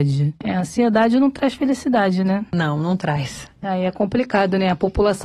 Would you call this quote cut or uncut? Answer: cut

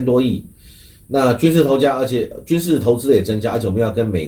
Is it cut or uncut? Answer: uncut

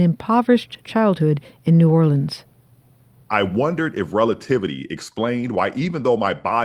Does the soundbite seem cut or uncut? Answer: uncut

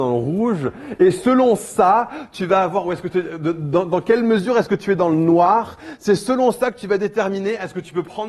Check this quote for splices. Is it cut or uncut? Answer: uncut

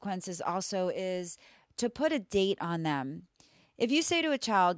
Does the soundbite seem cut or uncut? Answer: uncut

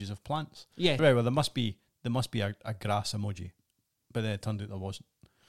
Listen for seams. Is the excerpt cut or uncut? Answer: cut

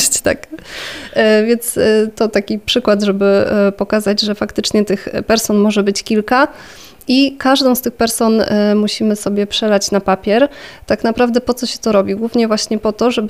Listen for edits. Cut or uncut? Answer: uncut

